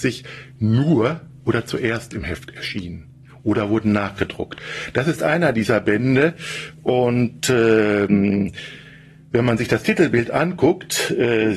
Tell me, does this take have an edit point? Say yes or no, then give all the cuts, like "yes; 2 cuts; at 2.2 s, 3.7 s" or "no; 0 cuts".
no; 0 cuts